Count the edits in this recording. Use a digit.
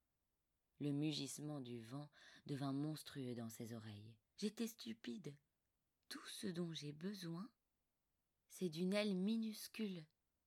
1